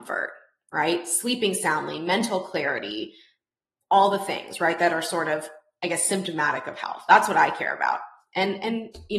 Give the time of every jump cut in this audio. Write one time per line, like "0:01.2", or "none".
none